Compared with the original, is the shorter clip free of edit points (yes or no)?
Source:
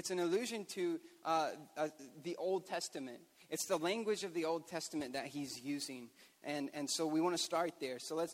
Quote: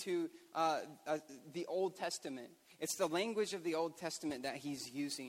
yes